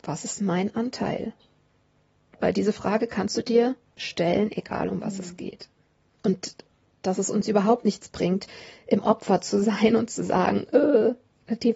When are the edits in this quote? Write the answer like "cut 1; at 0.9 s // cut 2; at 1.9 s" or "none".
cut 1; at 6.1 s

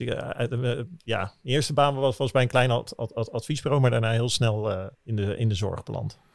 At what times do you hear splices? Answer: cut 1; at 4.9 s

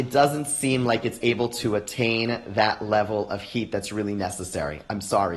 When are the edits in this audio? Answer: none

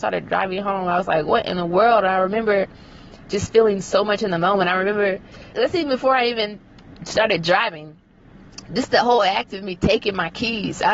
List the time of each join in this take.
cut 1; at 5.5 s

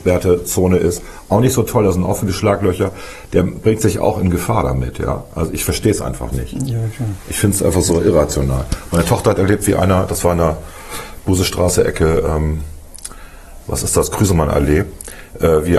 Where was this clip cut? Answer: none

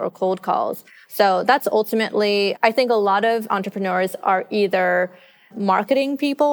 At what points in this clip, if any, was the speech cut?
cut 1; at 1.1 s // cut 2; at 2.6 s // cut 3; at 5.5 s

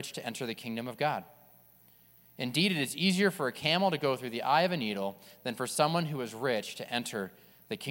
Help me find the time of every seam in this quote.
none

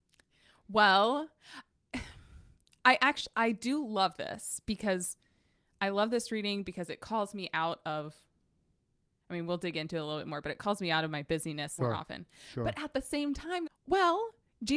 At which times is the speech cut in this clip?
cut 1; at 11.8 s // cut 2; at 13.7 s

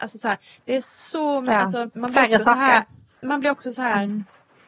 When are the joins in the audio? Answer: cut 1; at 1.9 s

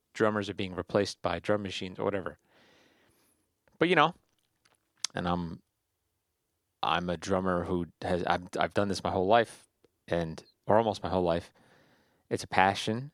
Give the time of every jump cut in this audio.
cut 1; at 5.1 s

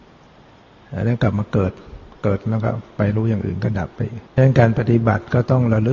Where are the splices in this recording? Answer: cut 1; at 4.3 s

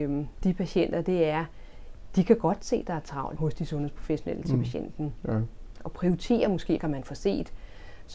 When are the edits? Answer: cut 1; at 3.4 s // cut 2; at 6.8 s

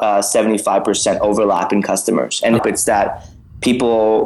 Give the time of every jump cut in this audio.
cut 1; at 2.6 s

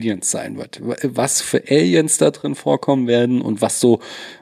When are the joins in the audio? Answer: none

